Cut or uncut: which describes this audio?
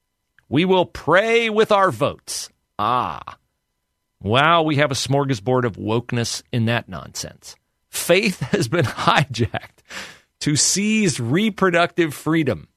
uncut